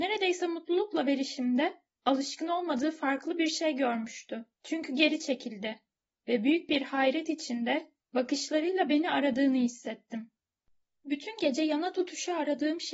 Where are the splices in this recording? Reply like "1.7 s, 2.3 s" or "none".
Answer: 4.5 s